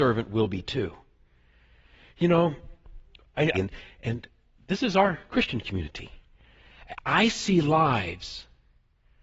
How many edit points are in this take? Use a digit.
1